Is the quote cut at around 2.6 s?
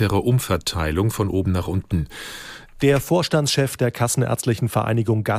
yes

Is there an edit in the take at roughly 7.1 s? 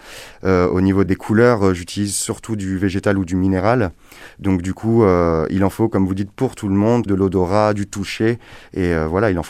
yes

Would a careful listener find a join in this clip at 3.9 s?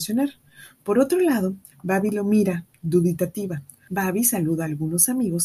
yes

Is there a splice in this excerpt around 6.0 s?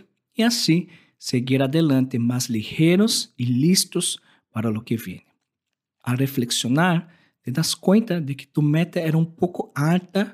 yes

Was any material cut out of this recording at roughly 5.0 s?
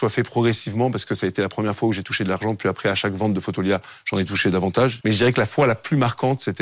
yes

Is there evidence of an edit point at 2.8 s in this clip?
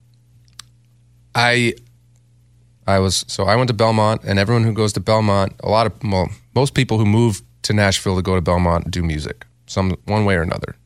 yes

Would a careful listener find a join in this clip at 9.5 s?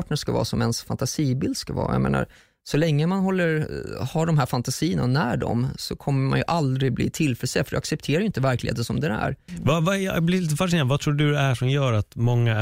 yes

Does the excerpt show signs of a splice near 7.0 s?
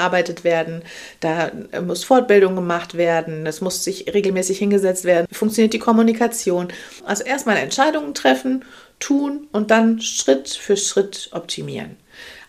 yes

